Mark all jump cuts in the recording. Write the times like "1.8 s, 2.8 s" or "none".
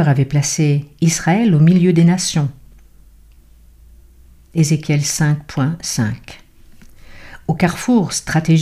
none

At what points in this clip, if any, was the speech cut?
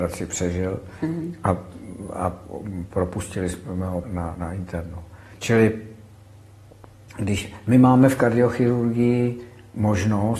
4.0 s, 5.3 s

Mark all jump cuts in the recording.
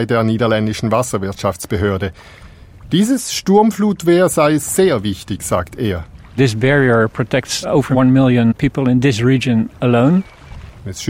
none

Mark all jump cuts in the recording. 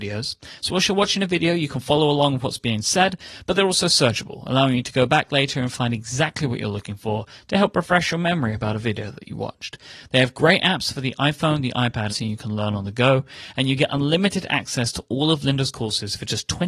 12.1 s

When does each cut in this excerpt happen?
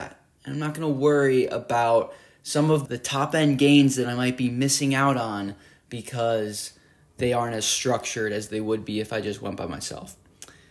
2.8 s

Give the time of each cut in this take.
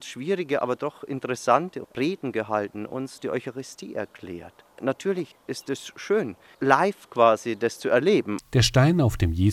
8.4 s

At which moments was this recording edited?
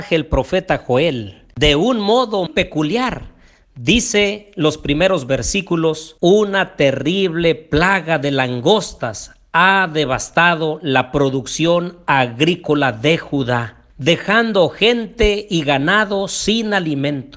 2.5 s, 6.2 s, 13.9 s

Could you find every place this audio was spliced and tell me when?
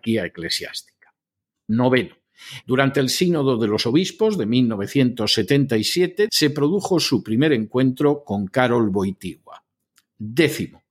2.6 s, 6.3 s

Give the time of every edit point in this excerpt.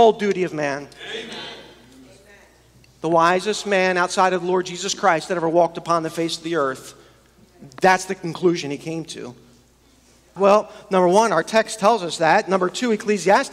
10.4 s

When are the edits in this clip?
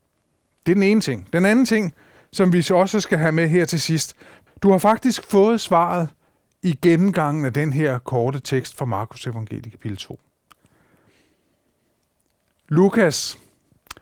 4.5 s

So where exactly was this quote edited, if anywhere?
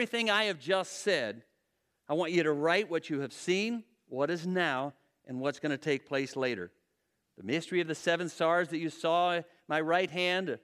none

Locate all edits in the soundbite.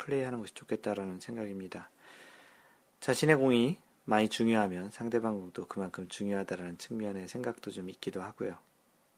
none

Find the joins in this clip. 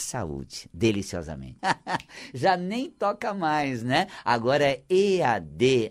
1.6 s

